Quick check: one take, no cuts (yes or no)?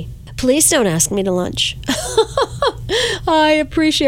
yes